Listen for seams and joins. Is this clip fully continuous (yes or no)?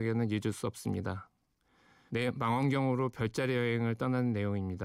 no